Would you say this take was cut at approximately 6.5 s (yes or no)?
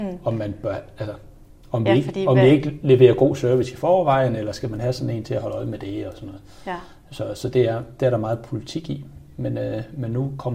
no